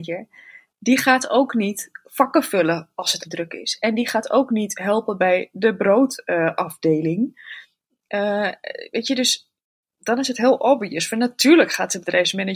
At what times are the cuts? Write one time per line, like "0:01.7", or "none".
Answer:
0:03.2